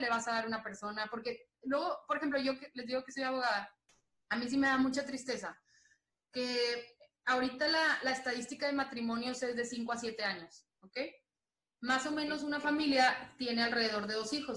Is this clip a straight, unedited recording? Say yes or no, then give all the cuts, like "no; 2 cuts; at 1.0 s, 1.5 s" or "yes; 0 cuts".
yes; 0 cuts